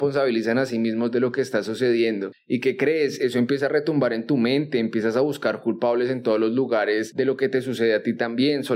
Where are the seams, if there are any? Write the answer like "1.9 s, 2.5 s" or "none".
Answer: none